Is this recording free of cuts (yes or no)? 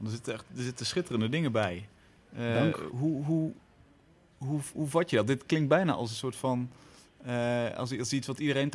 yes